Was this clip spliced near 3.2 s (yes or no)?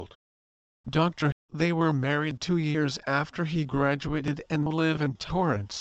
no